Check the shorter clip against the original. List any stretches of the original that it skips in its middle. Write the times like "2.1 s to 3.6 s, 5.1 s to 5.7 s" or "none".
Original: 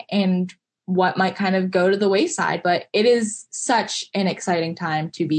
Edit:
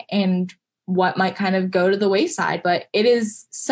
none